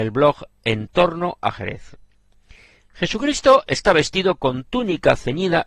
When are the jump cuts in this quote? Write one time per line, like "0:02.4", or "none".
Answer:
none

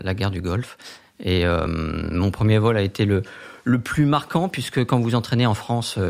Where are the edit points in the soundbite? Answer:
none

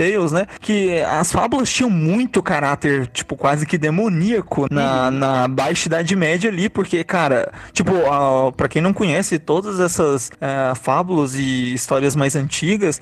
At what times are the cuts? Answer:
none

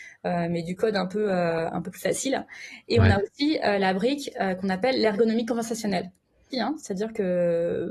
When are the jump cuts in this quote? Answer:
0:02.8
0:06.5

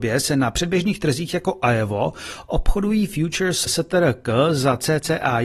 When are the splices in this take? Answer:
0:03.7

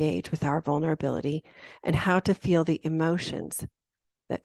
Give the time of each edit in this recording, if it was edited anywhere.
none

